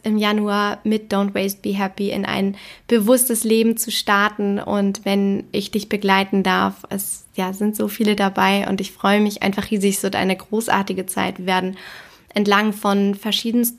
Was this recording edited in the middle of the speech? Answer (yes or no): no